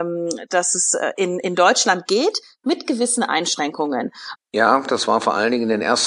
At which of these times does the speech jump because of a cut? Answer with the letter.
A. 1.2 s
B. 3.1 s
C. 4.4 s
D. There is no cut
C